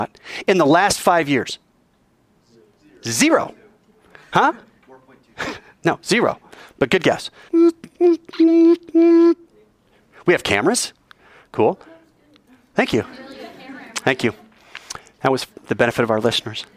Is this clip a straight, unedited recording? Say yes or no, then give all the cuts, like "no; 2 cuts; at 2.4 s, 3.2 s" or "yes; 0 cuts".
no; 1 cut; at 7.5 s